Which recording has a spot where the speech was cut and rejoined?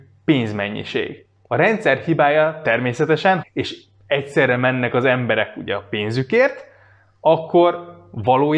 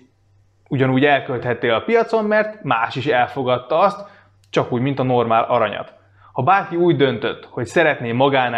first; 2 cuts; at 1.5 s, 3.4 s

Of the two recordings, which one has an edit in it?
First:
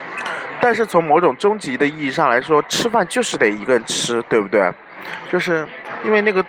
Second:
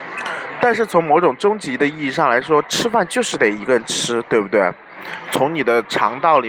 second; 1 cut; at 5.3 s

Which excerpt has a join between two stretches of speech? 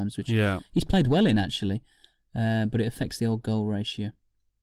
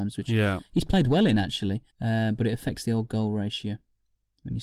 second; 1 cut; at 1.9 s

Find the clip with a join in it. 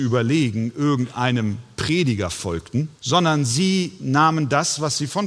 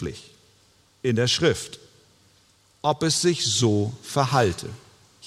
first; 1 cut; at 3.0 s

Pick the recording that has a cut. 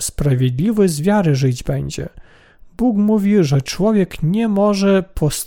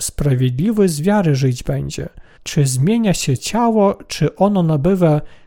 second; 1 cut; at 2.4 s

